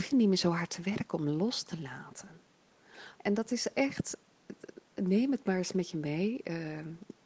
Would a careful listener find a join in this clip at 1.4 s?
no; 1 cut; at 3.2 s

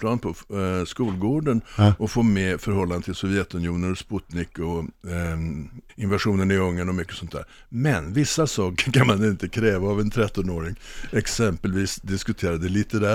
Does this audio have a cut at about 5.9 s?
yes; 1 cut; at 5.9 s

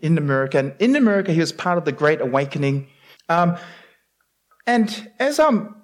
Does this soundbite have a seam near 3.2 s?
yes; 1 cut; at 3.2 s

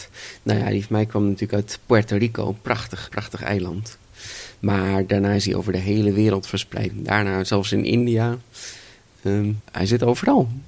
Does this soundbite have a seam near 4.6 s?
no; 3 cuts; at 3.1 s, 6.9 s, 9.6 s

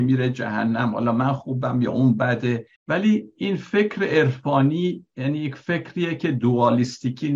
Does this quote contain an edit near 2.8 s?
yes; 1 cut; at 2.8 s

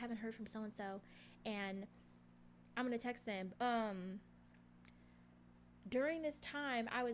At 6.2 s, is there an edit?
no; 1 cut; at 3.6 s

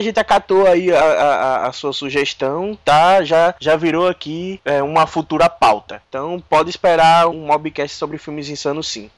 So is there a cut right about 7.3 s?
yes; 1 cut; at 7.3 s

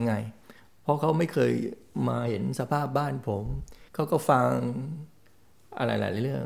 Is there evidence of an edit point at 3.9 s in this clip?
yes; 1 cut; at 3.9 s

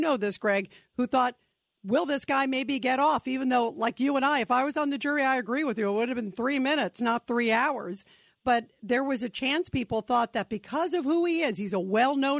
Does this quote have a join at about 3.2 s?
no; 0 cuts

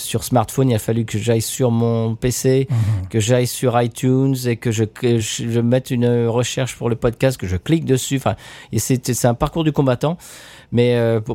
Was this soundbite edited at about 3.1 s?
no; 1 cut; at 5.2 s

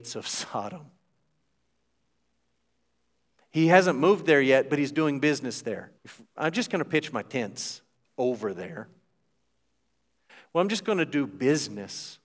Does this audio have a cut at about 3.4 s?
no; 1 cut; at 6.0 s

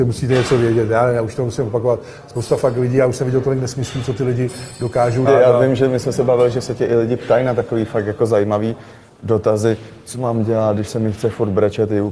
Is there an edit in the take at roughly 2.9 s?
no; 1 cut; at 5.3 s

